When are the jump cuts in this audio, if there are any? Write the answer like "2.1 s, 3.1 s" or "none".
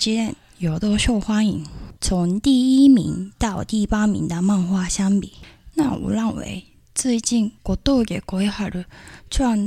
2.0 s, 5.7 s, 7.6 s